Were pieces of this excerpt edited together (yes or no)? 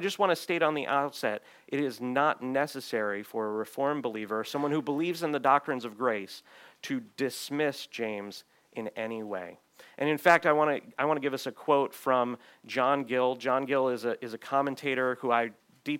no